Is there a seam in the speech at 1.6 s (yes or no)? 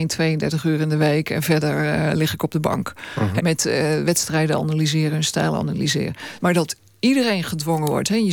no